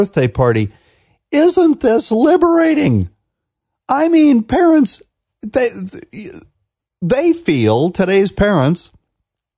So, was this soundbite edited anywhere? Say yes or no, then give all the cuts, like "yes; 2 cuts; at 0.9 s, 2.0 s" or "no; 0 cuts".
no; 0 cuts